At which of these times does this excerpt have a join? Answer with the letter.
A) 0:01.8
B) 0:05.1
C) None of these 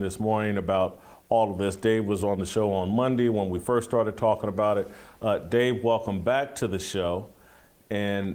C